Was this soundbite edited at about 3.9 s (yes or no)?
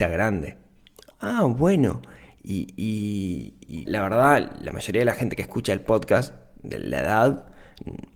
yes